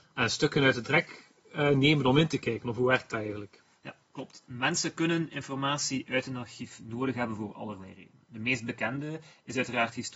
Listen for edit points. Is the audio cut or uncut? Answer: uncut